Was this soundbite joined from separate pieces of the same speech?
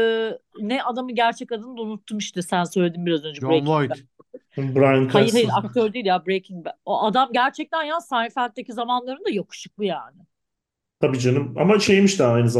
no; 0 cuts

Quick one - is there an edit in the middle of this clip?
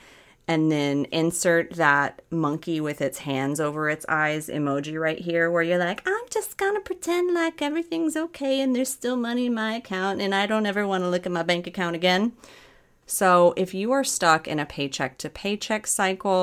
yes; 1 cut; at 13.0 s

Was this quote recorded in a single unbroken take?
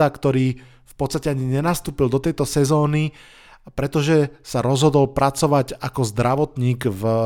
yes; 0 cuts

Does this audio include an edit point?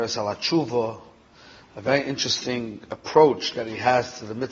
no; 0 cuts

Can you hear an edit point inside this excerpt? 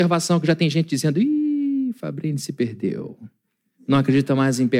no; 0 cuts

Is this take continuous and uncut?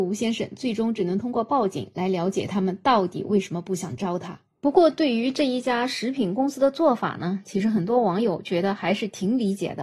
yes; 0 cuts

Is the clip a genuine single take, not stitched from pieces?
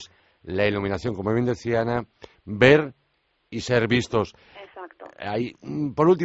yes; 0 cuts

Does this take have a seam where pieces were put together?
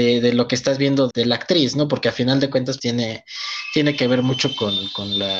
yes; 2 cuts; at 1.1 s, 2.8 s

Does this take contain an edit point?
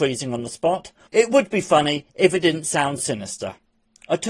yes; 2 cuts; at 1.1 s, 3.0 s

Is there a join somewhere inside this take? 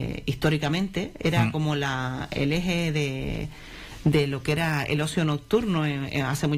no; 0 cuts

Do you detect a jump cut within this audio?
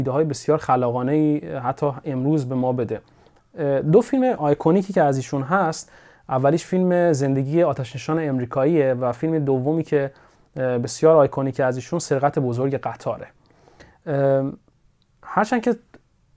no; 0 cuts

